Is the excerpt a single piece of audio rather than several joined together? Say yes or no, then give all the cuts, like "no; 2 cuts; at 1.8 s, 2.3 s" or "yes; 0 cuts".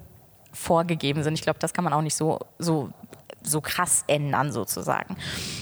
yes; 0 cuts